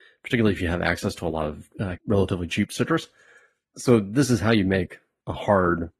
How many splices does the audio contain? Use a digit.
1